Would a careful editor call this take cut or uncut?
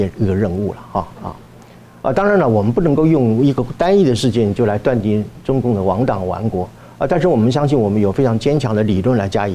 uncut